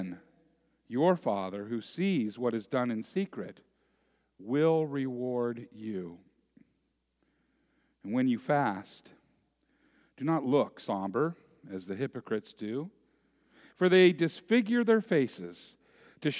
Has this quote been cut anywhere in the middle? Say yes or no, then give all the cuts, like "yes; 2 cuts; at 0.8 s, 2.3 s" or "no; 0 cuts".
no; 0 cuts